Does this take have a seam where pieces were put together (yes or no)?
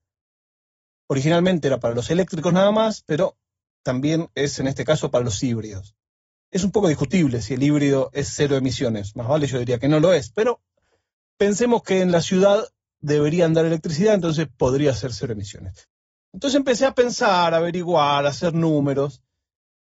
no